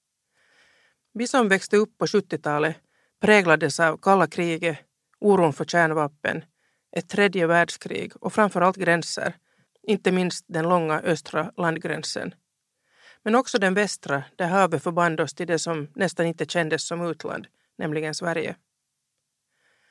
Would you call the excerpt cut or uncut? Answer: cut